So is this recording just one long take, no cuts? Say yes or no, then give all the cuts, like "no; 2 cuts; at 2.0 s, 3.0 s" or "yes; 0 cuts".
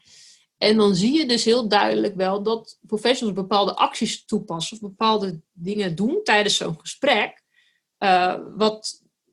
yes; 0 cuts